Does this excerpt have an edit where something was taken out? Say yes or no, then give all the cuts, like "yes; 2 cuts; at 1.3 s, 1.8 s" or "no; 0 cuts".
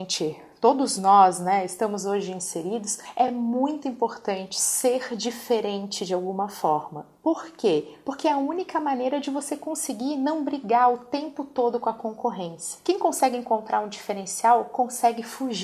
no; 0 cuts